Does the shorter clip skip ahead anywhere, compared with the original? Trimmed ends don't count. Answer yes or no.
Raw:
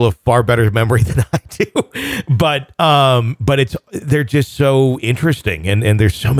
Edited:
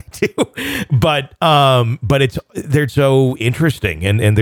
yes